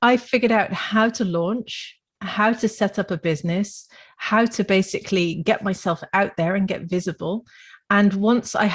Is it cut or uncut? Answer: uncut